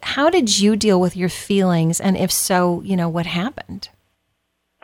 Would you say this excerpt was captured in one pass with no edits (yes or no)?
no